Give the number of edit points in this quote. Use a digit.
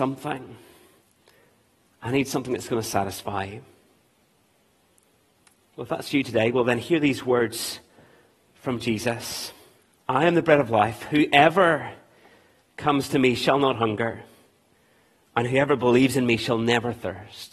1